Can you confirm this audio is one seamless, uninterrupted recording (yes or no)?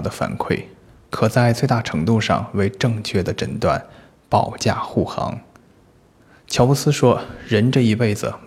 no